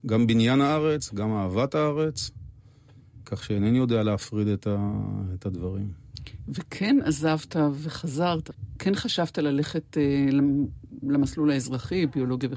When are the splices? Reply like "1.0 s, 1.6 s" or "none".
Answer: none